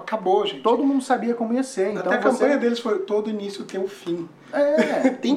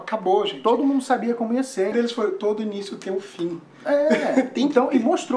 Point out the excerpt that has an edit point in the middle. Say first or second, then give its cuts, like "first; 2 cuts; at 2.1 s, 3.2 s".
second; 1 cut; at 1.9 s